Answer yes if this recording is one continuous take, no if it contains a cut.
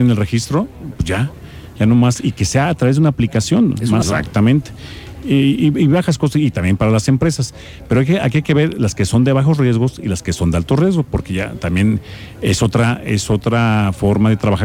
no